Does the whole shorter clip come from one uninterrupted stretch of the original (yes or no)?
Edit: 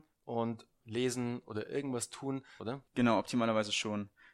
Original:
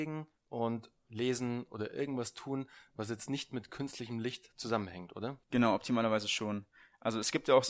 no